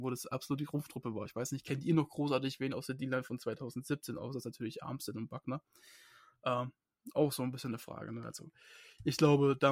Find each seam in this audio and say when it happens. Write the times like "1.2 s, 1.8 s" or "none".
none